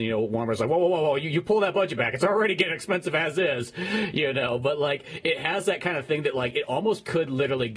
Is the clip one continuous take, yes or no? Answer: yes